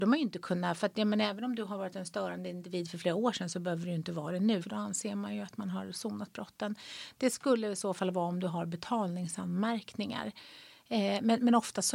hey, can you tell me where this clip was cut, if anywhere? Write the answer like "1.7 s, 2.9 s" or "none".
4.6 s